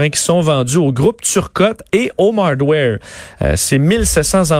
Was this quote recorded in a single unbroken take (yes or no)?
no